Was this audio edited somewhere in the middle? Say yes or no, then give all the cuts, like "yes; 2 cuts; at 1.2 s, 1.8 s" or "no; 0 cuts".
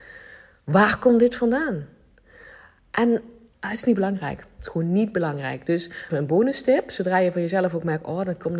yes; 2 cuts; at 3.5 s, 6.1 s